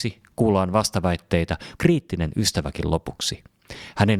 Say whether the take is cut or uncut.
cut